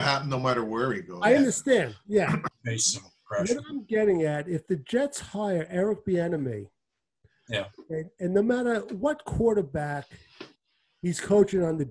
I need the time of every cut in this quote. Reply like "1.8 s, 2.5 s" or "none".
2.5 s

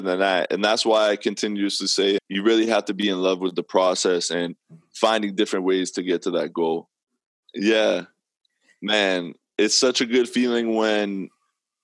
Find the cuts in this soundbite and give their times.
2.2 s, 7.5 s

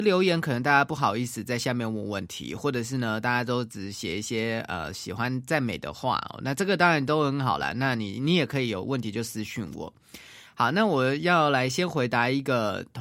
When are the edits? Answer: none

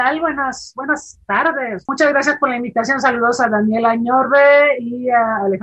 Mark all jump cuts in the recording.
none

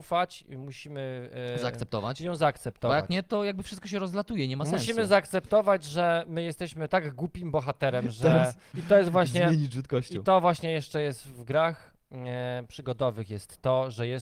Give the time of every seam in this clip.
8.7 s

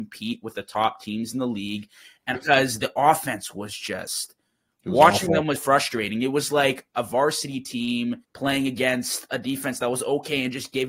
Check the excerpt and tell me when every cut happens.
2.3 s, 5.6 s, 8.2 s

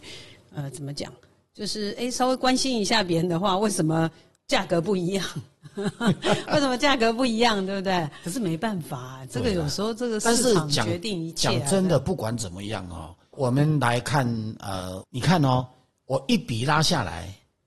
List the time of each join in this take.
8.2 s, 15.0 s

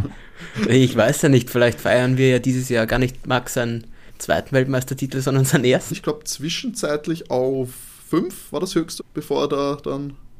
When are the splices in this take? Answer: 5.9 s, 9.0 s

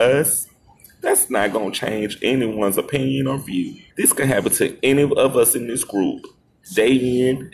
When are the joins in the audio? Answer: 3.9 s

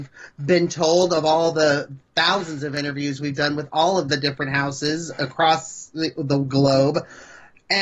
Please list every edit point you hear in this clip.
none

